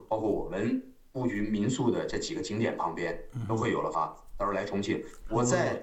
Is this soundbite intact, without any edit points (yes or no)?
no